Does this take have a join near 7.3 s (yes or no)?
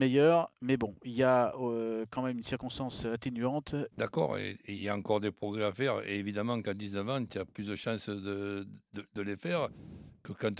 no